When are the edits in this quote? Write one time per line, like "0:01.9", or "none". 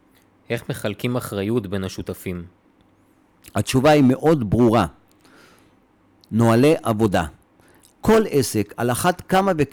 none